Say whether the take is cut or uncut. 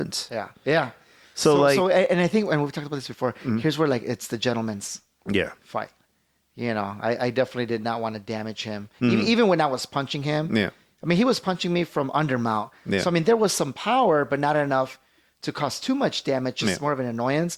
uncut